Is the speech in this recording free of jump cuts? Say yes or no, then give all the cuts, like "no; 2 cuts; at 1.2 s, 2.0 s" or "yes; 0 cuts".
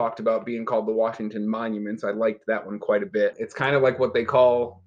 no; 1 cut; at 3.3 s